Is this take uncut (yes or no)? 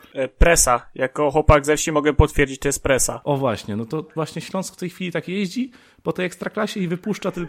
yes